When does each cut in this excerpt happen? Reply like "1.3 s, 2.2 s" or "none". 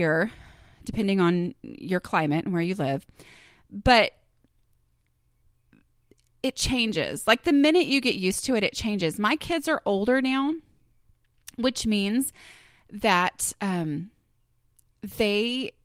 none